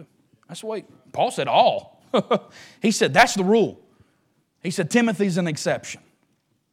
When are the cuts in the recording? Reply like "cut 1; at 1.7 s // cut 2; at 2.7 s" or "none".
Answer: none